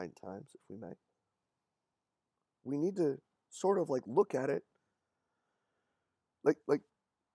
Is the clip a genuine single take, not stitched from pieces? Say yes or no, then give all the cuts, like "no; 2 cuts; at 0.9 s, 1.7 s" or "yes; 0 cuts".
yes; 0 cuts